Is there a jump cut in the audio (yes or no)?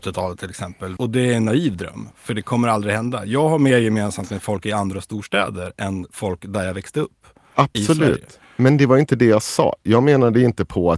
yes